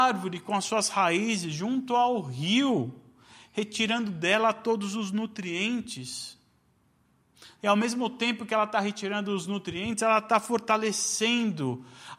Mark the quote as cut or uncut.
cut